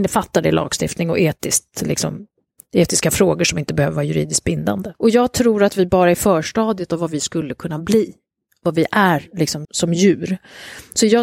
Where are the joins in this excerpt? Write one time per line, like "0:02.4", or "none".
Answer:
0:04.9
0:09.6

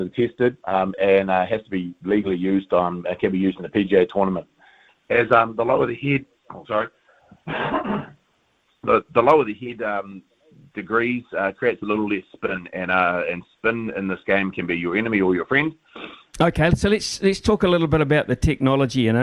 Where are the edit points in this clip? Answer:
0:04.9
0:16.3

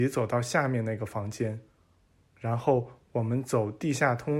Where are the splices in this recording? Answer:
none

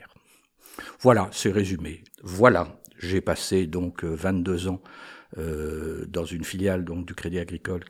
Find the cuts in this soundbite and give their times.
0:02.1

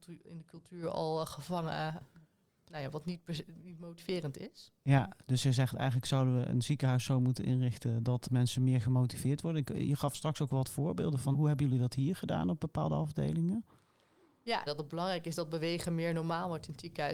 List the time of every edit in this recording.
0:11.3
0:14.7

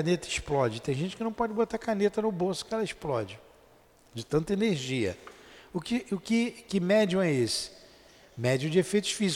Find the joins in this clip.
none

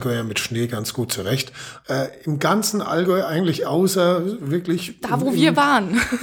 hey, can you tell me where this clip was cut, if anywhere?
0:01.8

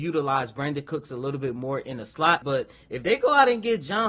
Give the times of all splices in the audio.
0:02.4

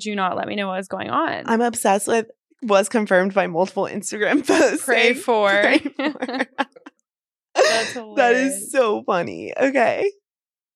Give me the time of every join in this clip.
none

